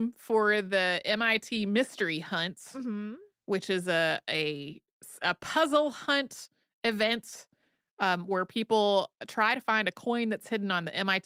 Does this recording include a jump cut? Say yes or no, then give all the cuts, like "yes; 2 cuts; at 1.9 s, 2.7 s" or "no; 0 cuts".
no; 0 cuts